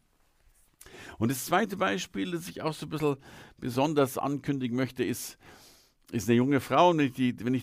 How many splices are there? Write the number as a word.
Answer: zero